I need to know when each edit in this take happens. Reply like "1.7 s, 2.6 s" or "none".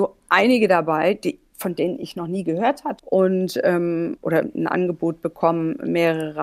3.0 s, 4.2 s